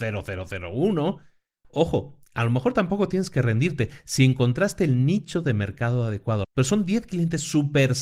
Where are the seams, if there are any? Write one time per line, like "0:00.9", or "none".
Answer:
0:01.6
0:06.4